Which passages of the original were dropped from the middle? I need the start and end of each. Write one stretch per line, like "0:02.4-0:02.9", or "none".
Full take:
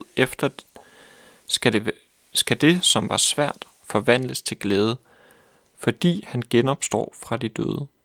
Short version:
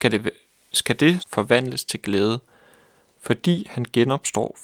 0:02.8-0:03.8